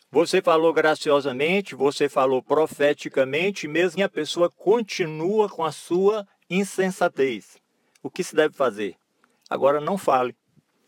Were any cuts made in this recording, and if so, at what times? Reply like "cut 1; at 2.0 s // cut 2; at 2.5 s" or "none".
cut 1; at 4.0 s